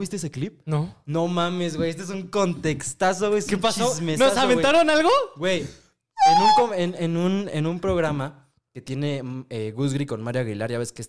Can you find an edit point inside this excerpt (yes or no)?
no